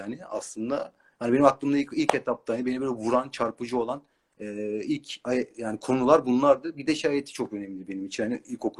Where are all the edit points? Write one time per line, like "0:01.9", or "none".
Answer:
none